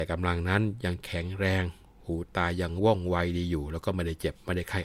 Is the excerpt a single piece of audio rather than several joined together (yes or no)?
yes